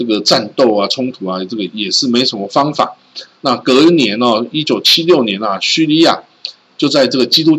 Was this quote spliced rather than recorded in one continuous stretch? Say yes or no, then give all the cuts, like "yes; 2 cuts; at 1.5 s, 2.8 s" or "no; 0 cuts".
yes; 1 cut; at 3.4 s